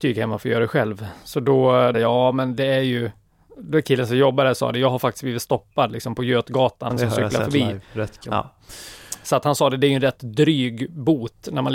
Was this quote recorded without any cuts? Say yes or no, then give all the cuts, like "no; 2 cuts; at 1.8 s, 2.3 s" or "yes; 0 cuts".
no; 3 cuts; at 1.9 s, 6.9 s, 8.3 s